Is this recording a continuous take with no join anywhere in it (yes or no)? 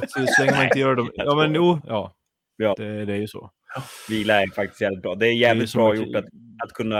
no